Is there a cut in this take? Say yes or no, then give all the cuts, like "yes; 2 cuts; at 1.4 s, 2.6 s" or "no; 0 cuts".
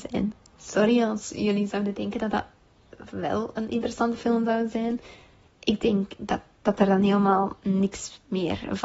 no; 0 cuts